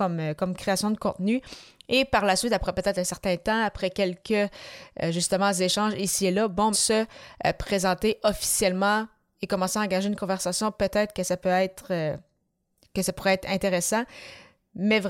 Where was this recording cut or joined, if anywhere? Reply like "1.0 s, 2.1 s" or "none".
6.7 s